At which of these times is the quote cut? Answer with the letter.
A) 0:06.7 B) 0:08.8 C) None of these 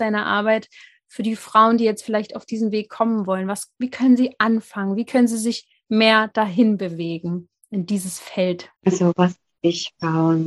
B